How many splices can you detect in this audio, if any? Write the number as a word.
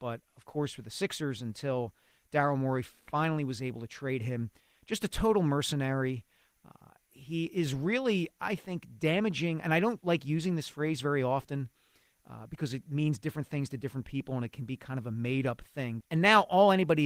one